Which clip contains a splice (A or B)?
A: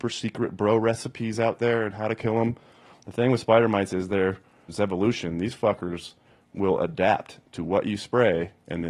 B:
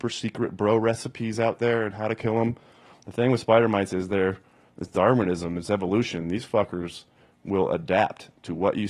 A